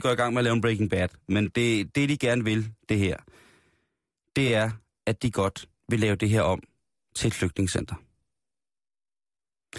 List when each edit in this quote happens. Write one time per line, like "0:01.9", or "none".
none